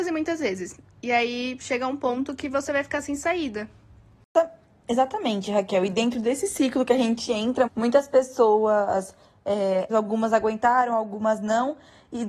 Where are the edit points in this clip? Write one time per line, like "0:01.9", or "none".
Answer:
0:07.7
0:09.9